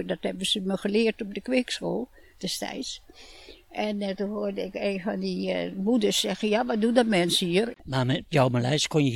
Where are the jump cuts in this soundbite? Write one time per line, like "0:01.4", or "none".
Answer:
0:07.7